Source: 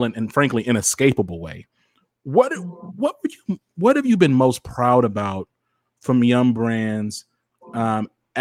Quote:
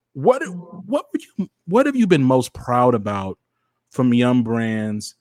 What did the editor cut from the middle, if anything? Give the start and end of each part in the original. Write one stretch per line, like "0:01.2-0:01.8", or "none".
none